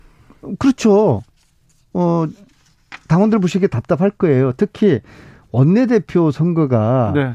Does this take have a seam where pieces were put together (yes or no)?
no